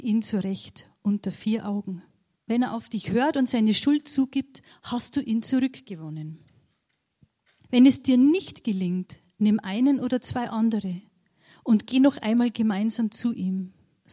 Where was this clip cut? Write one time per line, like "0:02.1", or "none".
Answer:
0:02.3
0:07.6